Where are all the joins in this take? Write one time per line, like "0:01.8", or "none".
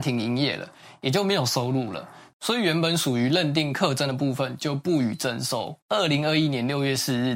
0:05.8

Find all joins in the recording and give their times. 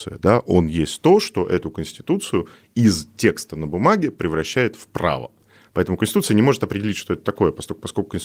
none

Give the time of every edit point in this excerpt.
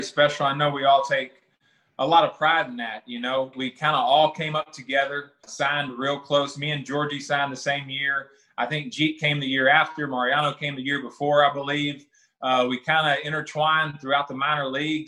0:03.5
0:05.4

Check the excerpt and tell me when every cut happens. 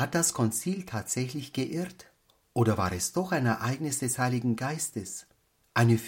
none

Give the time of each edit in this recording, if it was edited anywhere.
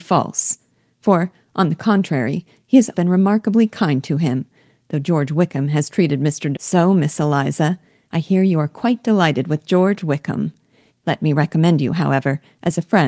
0:02.9
0:06.5
0:10.9

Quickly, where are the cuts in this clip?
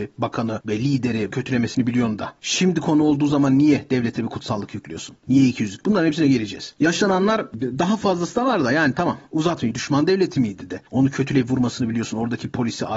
0:01.3
0:09.7

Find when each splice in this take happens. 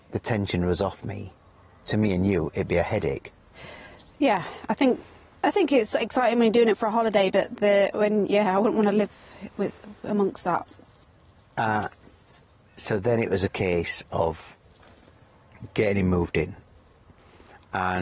0:01.8

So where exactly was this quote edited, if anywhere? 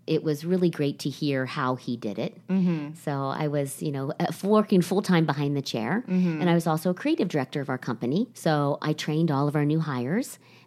0:08.3

